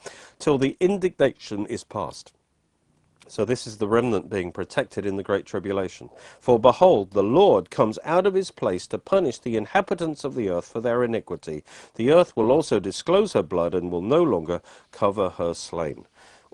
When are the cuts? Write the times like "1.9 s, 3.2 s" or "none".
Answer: none